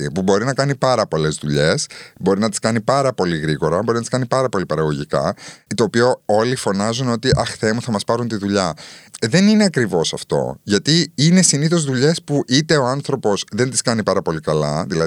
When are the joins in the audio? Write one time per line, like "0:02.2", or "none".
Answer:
none